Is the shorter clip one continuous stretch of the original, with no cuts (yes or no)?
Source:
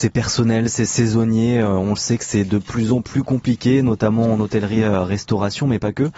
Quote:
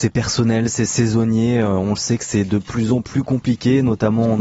yes